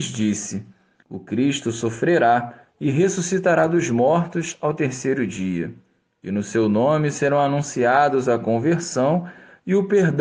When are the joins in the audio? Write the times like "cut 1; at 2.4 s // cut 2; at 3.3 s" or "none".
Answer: cut 1; at 1.0 s